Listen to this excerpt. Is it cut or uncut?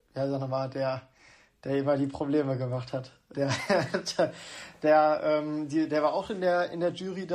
cut